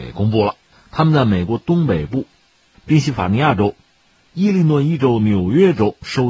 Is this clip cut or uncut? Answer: cut